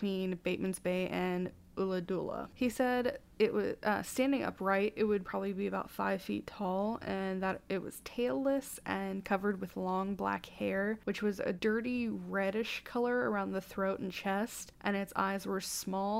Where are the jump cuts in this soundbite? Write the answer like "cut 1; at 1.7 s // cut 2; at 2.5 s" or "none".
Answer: none

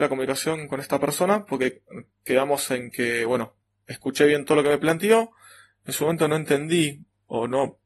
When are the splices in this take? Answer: none

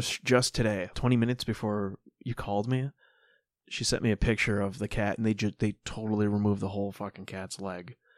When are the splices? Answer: cut 1; at 0.9 s

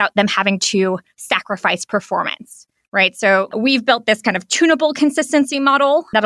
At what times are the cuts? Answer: cut 1; at 3.5 s

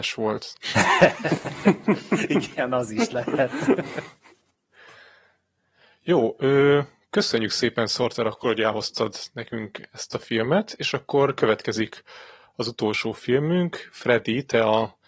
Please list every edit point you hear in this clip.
none

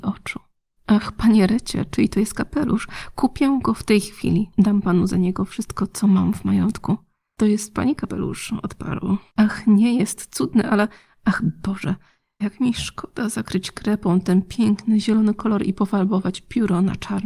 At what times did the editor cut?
cut 1; at 9.3 s // cut 2; at 12.4 s

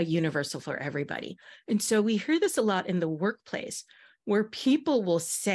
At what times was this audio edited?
none

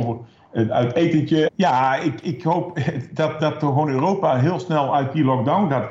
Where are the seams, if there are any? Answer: cut 1; at 1.5 s // cut 2; at 3.4 s

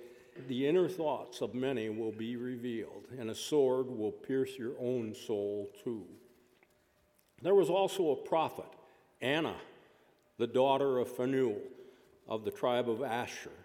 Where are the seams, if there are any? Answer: none

